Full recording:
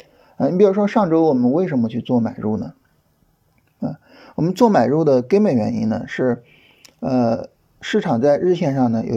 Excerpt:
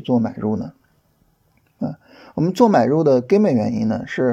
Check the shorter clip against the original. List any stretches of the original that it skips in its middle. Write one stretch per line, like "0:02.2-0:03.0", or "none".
none